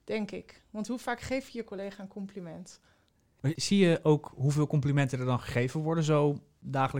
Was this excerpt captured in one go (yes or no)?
yes